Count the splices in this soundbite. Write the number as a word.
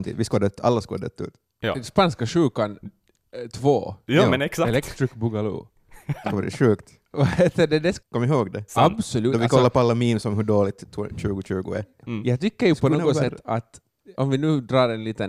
three